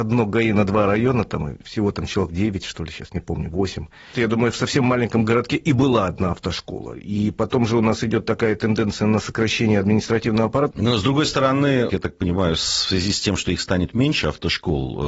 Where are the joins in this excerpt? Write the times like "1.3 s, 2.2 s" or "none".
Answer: 4.1 s, 10.7 s, 11.9 s